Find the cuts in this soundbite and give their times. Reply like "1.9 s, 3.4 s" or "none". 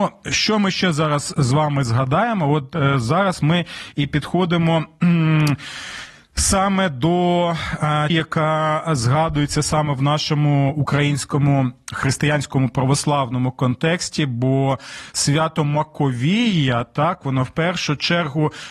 8.1 s